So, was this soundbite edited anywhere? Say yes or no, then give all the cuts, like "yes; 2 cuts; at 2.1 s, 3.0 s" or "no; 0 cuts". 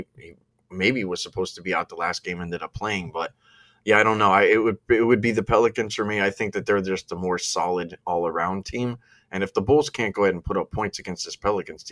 no; 0 cuts